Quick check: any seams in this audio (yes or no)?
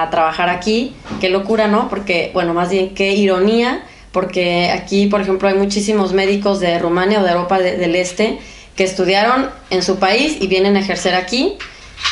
no